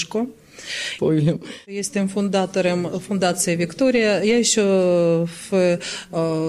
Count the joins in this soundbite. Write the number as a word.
one